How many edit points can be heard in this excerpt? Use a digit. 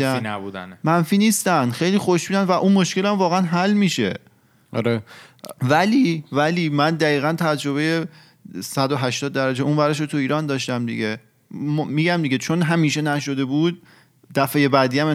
0